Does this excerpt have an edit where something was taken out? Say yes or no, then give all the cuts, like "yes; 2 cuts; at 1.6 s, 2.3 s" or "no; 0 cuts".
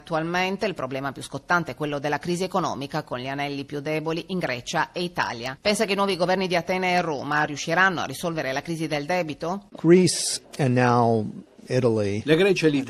no; 0 cuts